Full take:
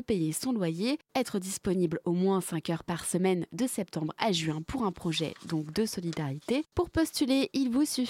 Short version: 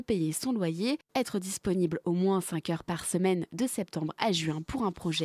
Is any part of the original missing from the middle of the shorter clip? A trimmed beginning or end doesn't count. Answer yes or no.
no